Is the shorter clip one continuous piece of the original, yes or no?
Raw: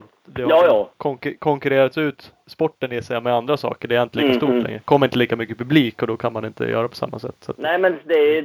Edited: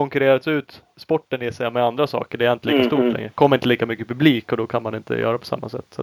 yes